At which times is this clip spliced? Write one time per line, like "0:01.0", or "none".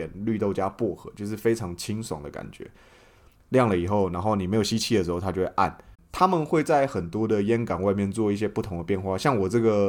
0:03.4
0:05.9